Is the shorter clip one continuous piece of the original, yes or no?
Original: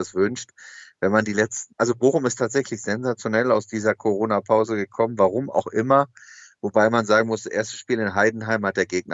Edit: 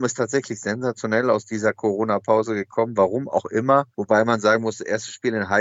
no